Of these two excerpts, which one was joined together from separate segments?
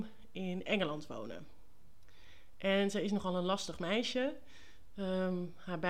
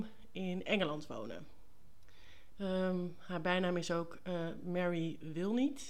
second; 1 cut; at 2.5 s

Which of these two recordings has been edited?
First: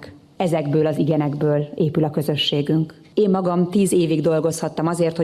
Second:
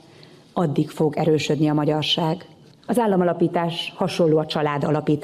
second; 1 cut; at 2.7 s

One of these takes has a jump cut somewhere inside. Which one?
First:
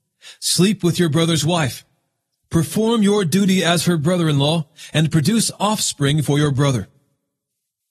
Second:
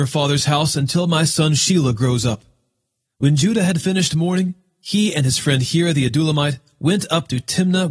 second; 1 cut; at 3.0 s

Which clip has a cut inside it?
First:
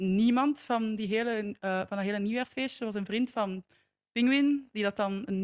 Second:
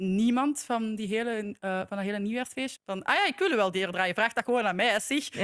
second; 1 cut; at 2.8 s

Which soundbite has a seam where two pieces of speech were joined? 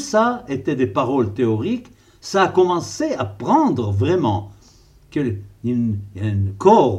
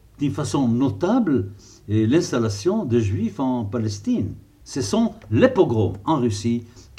second; 1 cut; at 4.6 s

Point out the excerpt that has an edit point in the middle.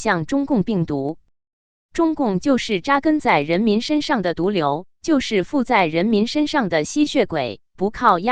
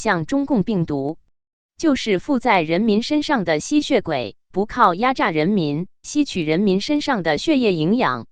second; 1 cut; at 1.7 s

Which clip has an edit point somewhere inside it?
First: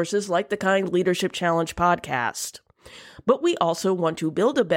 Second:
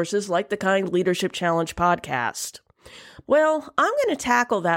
second; 1 cut; at 3.2 s

